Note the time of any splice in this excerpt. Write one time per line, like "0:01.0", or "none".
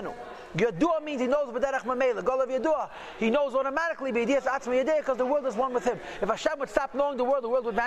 none